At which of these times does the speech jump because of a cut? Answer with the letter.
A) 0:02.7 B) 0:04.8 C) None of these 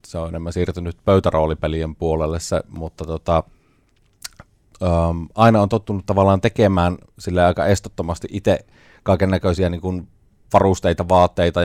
C